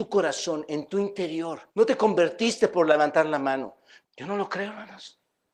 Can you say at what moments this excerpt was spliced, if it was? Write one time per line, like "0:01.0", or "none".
0:01.7
0:04.0